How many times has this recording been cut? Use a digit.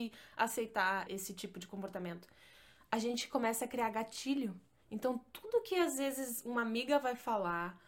1